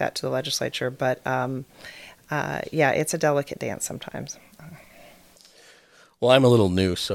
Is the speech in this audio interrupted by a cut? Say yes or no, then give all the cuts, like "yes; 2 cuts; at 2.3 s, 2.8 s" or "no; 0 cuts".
no; 0 cuts